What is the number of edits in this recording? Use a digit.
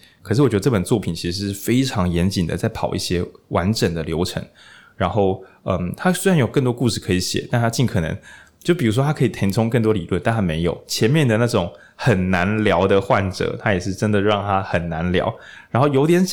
0